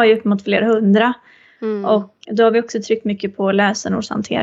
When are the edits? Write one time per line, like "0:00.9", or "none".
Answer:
0:02.2